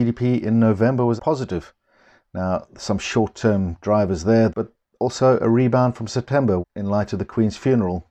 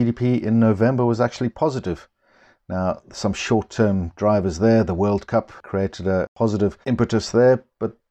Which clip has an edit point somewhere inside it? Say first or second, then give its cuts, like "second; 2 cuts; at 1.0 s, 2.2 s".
first; 3 cuts; at 1.2 s, 4.5 s, 6.6 s